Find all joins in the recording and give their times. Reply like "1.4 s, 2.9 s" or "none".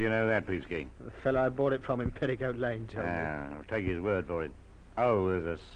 none